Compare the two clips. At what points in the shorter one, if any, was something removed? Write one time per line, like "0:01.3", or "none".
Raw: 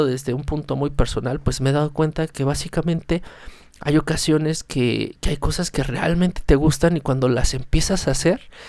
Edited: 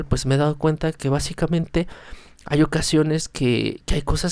none